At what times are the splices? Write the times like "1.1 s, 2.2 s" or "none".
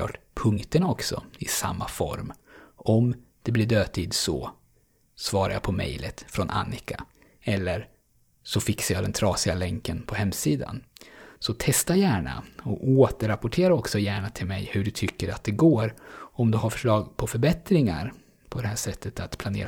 7.3 s, 11.4 s

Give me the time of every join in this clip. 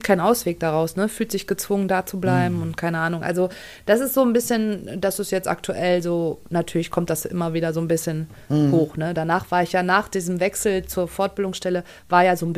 none

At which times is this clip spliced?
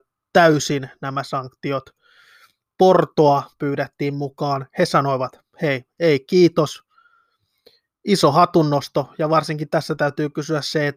none

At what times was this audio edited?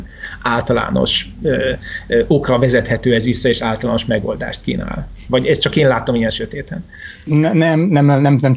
none

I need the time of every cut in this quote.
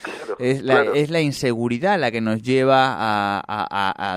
none

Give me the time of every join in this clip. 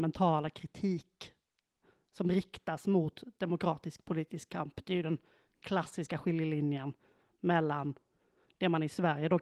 none

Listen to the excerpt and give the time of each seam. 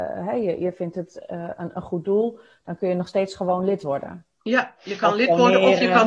none

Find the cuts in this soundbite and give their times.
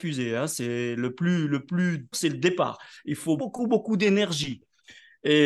2.1 s, 3.4 s

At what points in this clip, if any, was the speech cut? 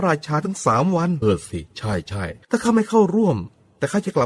1.2 s, 2.4 s

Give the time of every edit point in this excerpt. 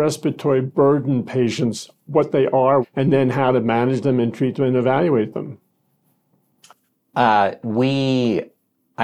2.8 s

